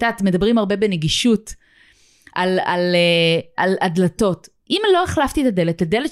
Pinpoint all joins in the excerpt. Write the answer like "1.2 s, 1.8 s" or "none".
none